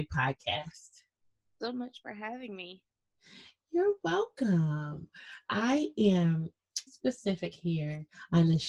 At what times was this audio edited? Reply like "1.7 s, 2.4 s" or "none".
6.9 s